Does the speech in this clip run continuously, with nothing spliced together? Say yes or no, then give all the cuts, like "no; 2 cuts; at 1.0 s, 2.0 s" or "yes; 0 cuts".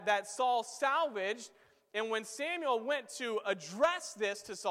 yes; 0 cuts